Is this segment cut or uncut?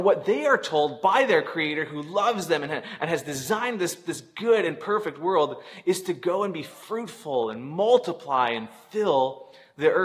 uncut